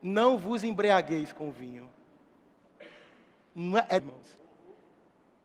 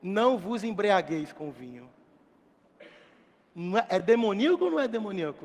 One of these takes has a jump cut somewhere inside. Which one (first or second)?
first